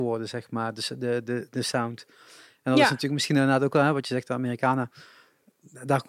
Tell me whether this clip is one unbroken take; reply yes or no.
yes